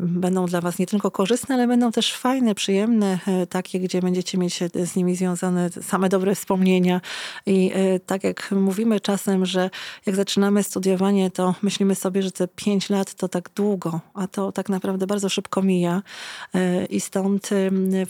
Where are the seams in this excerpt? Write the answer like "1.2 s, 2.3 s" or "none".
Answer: none

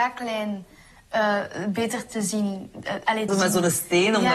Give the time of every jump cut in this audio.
3.3 s

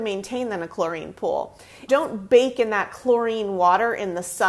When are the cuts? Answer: 1.9 s

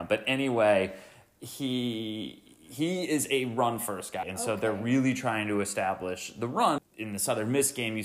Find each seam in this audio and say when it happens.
4.2 s, 6.8 s

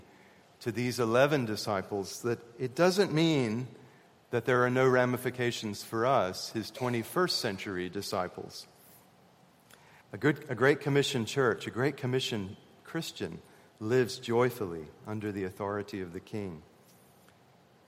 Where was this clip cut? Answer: 10.0 s

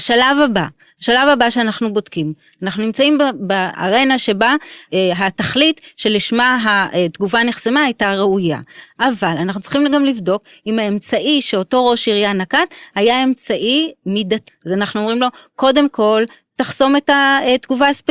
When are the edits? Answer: 14.5 s

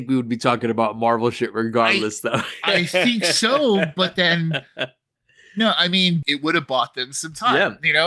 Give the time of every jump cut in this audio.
6.2 s

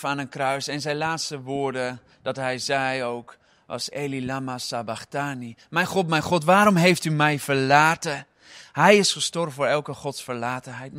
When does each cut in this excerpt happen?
3.9 s

